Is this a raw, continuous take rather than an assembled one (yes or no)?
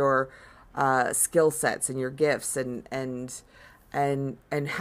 yes